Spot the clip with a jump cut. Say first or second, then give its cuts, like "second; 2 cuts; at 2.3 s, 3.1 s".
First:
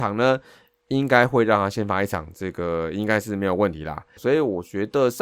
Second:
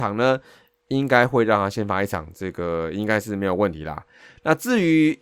first; 1 cut; at 4.2 s